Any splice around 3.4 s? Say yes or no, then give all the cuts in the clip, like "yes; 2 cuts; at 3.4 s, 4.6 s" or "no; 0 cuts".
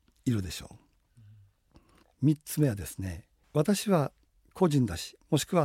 no; 1 cut; at 2.0 s